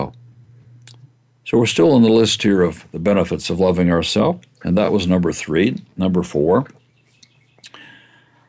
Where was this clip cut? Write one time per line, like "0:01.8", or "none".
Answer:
none